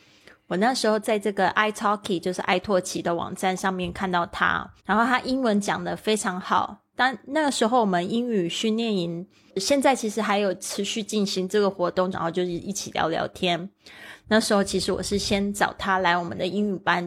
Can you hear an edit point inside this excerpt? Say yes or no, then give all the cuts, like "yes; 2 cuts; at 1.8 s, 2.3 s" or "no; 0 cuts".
yes; 2 cuts; at 4.8 s, 12.1 s